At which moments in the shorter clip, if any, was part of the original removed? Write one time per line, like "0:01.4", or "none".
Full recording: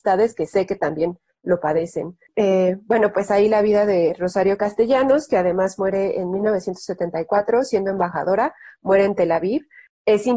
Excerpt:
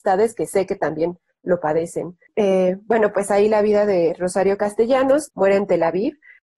0:05.3